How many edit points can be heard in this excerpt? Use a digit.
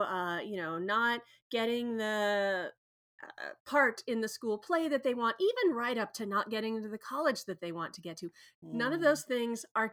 1